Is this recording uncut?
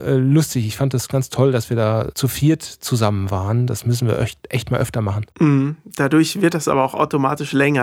yes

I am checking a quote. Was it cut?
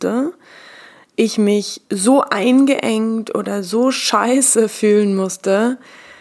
no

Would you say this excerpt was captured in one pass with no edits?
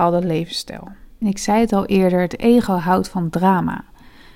yes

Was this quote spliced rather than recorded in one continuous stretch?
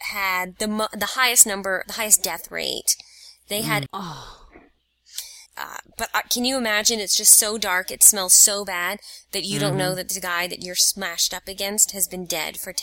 yes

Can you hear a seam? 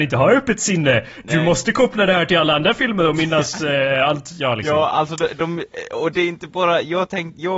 no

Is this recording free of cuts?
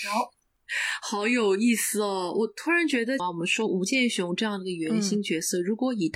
no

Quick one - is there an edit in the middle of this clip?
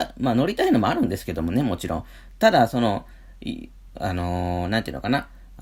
no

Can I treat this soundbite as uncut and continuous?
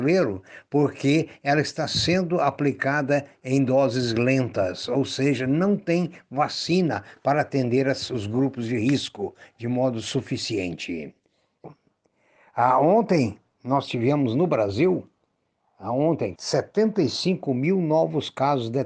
no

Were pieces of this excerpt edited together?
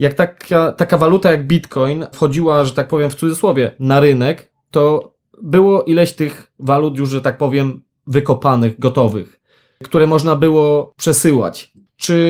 no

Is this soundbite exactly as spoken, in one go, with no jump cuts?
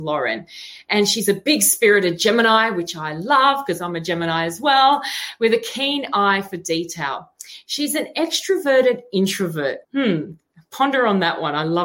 no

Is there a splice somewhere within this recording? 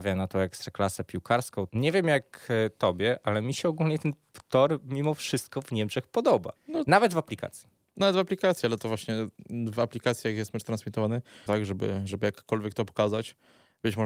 yes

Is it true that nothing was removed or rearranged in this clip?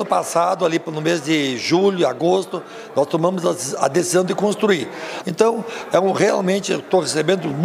no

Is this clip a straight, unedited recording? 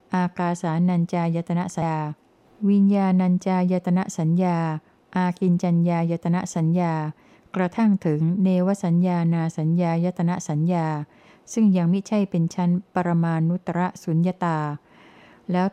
no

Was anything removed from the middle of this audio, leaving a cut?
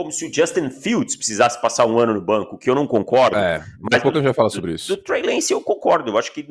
no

